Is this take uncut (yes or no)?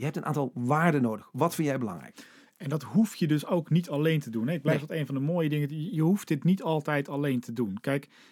yes